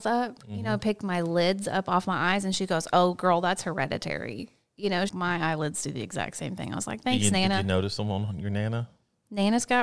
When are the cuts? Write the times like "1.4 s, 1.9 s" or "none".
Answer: 5.1 s